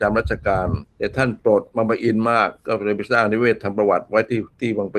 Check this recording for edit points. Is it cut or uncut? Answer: cut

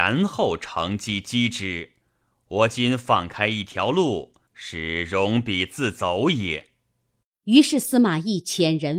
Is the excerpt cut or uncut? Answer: cut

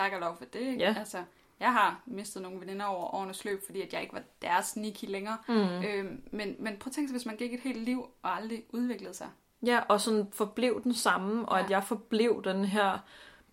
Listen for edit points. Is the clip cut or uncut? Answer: uncut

